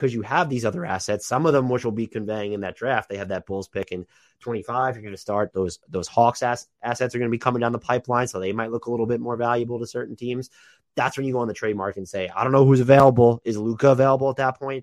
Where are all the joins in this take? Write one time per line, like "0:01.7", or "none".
none